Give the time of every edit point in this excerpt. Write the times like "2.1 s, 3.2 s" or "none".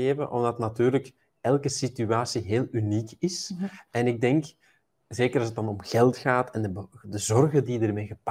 none

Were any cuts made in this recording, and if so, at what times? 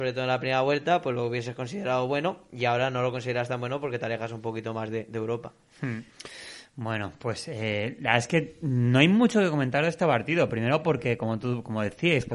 none

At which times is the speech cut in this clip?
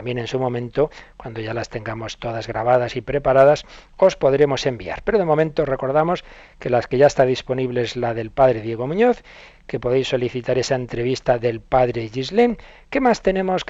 none

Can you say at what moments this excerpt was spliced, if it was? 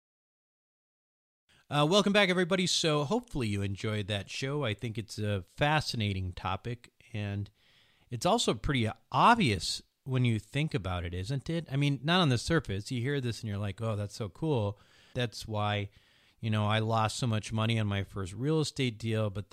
15.1 s

